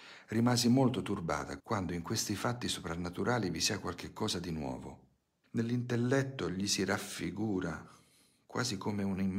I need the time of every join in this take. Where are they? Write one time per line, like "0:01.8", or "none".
0:01.6
0:05.4

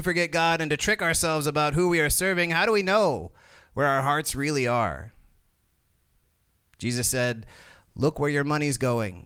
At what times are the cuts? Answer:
none

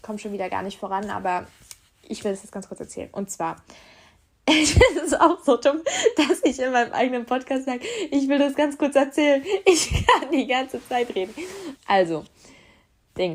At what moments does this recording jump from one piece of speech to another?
0:11.7

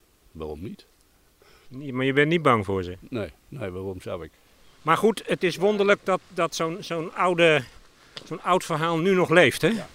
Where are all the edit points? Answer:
0:01.6

